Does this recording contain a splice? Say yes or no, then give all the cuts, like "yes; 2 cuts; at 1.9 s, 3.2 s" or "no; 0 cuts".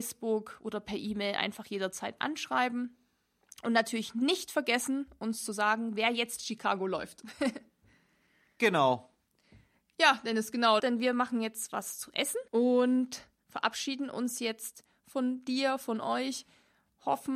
yes; 2 cuts; at 10.8 s, 12.5 s